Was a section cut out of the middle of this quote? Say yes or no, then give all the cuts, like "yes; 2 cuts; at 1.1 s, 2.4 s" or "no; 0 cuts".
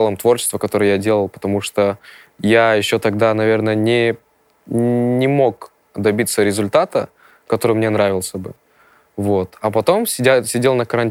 no; 0 cuts